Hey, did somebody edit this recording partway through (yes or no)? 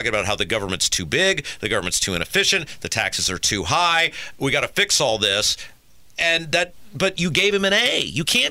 no